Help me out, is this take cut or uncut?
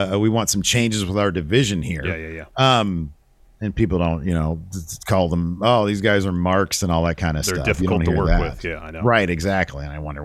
uncut